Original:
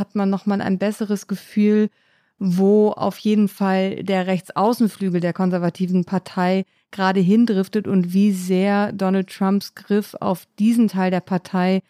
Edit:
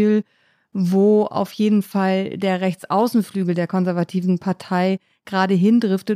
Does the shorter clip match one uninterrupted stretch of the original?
yes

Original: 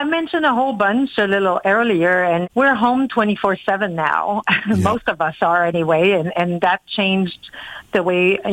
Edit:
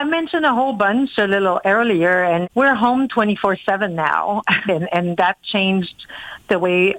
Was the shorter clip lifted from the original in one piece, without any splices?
no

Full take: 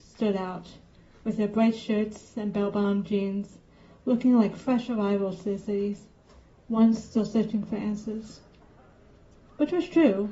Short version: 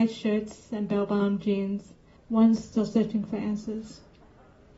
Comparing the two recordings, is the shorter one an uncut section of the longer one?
no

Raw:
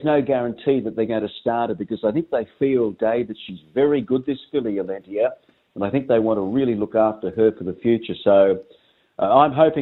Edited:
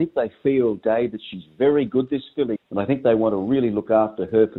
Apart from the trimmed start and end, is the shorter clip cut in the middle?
yes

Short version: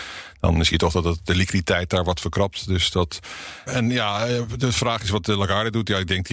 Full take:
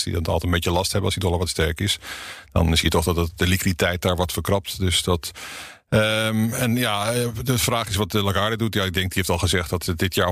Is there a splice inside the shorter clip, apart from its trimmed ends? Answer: yes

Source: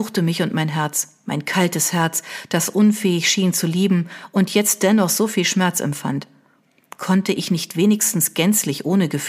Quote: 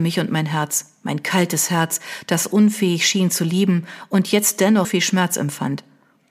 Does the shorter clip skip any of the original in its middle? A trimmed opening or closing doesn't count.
yes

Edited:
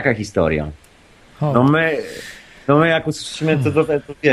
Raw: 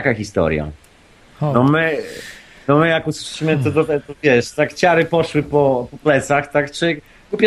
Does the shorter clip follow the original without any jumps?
yes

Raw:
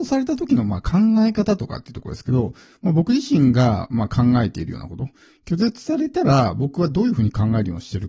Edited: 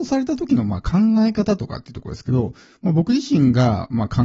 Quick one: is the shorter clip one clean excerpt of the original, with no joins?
yes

